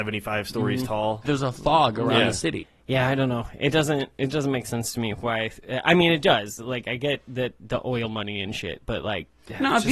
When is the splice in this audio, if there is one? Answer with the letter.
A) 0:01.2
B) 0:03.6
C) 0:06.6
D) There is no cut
A